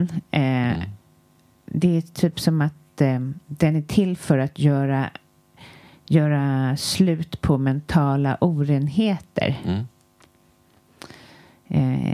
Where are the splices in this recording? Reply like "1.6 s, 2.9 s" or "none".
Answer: none